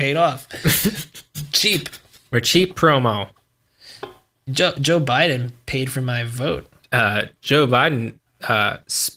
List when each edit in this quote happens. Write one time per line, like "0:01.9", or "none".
none

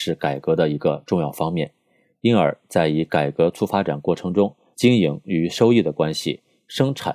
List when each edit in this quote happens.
0:02.1
0:04.7

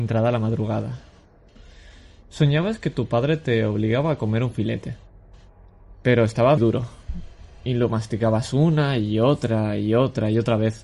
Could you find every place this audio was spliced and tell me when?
0:06.6

